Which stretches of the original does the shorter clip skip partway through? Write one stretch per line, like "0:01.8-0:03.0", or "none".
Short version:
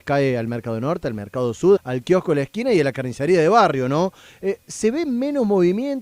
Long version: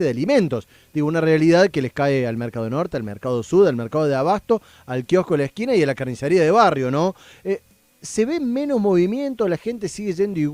0:03.6-0:04.8
0:07.6-0:08.0